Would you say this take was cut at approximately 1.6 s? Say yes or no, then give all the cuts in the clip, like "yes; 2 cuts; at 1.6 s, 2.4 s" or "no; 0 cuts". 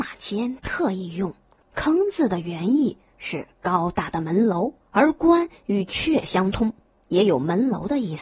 yes; 2 cuts; at 1.6 s, 4.8 s